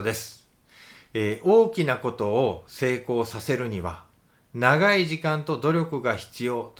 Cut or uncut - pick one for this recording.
uncut